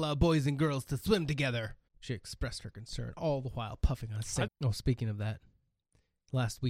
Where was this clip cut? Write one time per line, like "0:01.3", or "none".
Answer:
0:01.9
0:04.5